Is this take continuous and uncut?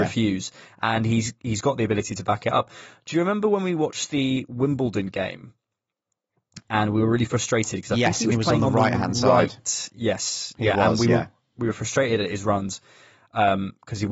yes; 0 cuts

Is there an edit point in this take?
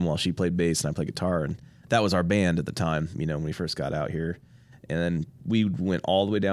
no; 0 cuts

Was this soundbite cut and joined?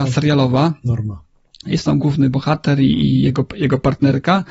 yes; 1 cut; at 2.0 s

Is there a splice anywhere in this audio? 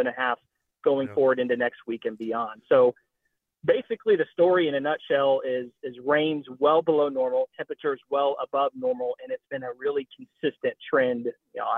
no; 0 cuts

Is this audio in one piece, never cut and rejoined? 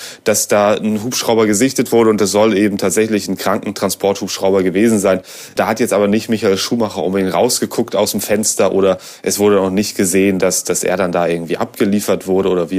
yes; 0 cuts

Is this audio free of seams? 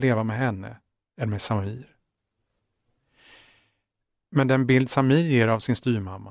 yes; 0 cuts

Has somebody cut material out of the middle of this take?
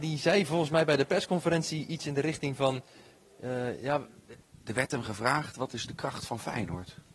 no; 0 cuts

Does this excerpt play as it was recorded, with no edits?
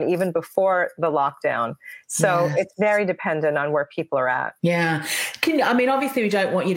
no; 1 cut; at 4.6 s

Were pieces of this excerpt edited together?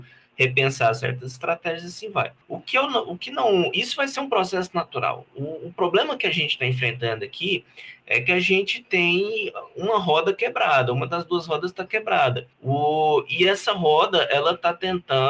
yes; 2 cuts; at 2.4 s, 12.5 s

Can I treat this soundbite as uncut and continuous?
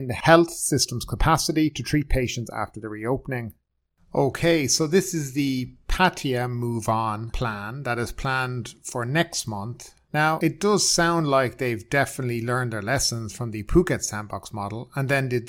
yes; 0 cuts

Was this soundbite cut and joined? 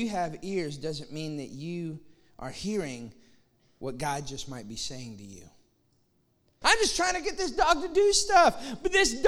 yes; 1 cut; at 6.6 s

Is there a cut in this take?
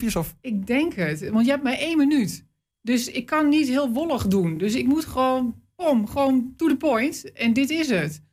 no; 0 cuts

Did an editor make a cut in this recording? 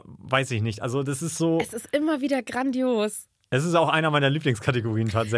no; 0 cuts

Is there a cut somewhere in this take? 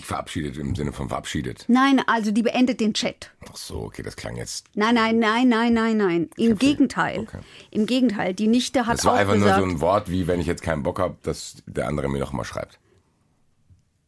no; 0 cuts

